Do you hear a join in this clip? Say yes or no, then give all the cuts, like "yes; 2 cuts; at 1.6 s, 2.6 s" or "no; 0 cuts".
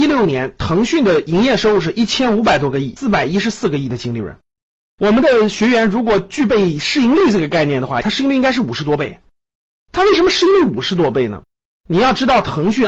yes; 1 cut; at 8.0 s